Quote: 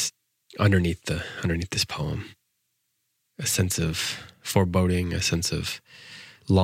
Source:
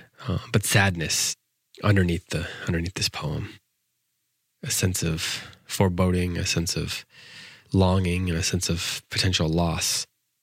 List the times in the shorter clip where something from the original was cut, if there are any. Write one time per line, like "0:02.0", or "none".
none